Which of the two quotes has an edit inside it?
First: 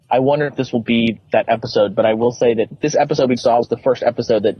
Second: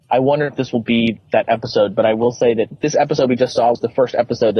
first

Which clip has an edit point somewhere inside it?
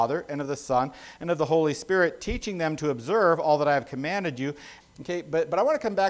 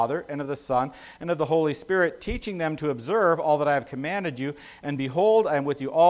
first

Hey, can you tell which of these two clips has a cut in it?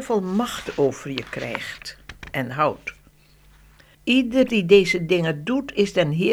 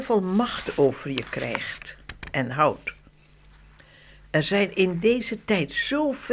first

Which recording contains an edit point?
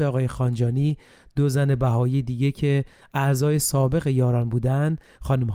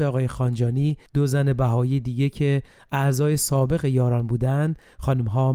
second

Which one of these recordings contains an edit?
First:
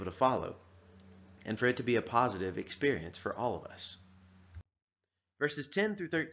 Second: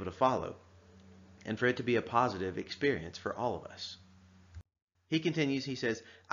second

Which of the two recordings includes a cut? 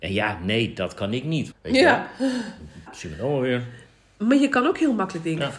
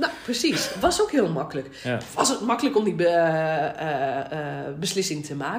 first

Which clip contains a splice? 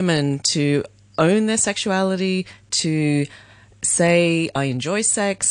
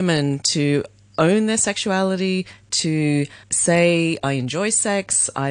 second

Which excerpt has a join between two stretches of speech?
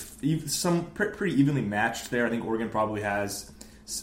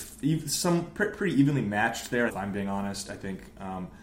second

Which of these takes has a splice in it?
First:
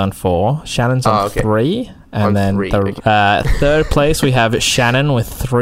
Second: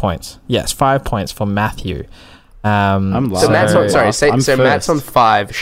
first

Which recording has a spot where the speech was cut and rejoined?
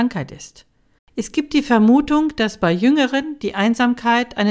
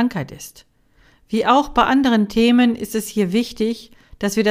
first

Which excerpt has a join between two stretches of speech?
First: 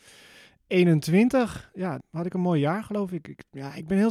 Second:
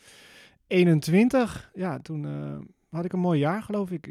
first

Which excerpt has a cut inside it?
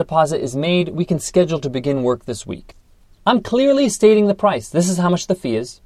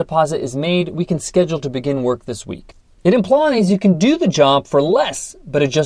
second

